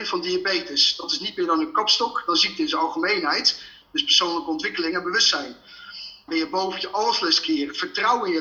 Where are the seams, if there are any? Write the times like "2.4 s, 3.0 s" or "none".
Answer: 3.8 s, 6.3 s